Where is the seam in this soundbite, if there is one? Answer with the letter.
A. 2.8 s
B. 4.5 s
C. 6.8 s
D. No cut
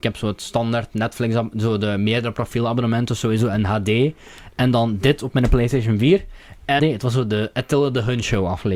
C